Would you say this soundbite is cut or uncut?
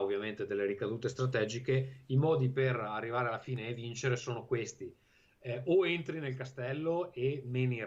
uncut